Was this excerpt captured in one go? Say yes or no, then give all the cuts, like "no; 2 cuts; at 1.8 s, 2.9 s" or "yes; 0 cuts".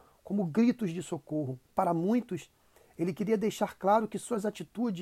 no; 1 cut; at 1.6 s